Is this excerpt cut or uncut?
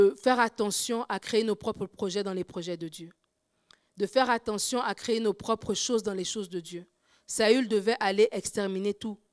uncut